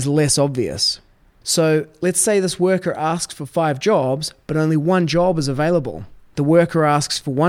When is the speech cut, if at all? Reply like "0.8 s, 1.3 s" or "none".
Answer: 1.4 s, 6.3 s